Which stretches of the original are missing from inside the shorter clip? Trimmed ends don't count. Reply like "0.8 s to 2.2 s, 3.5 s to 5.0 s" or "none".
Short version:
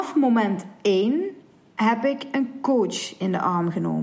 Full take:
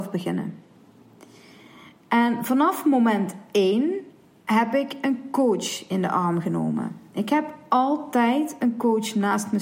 none

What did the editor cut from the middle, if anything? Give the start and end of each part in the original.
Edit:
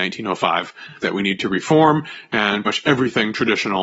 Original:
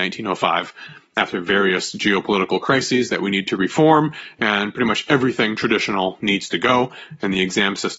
1.0 s to 3.1 s, 4.7 s to 4.9 s

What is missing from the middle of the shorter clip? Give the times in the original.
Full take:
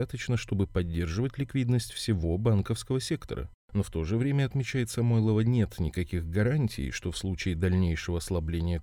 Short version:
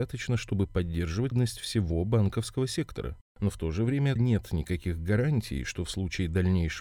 1.3 s to 1.6 s, 4.5 s to 5.4 s

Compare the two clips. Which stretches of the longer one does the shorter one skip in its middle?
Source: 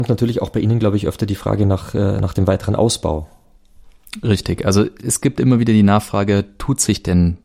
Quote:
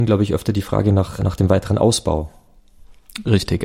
1.9 s to 2.2 s

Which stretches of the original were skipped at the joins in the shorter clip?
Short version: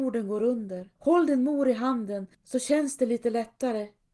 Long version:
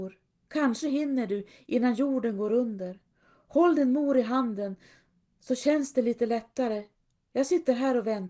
3.0 s to 3.4 s, 4.8 s to 5.3 s

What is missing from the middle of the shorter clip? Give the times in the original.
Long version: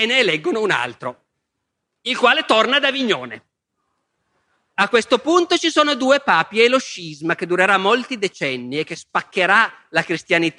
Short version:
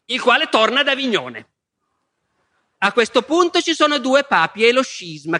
none

